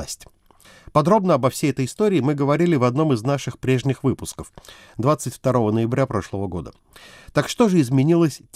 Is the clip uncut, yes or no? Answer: yes